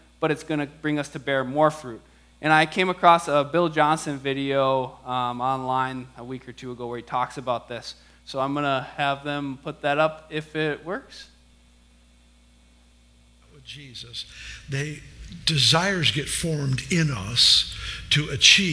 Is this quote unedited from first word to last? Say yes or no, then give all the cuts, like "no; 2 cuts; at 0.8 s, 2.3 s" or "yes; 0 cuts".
yes; 0 cuts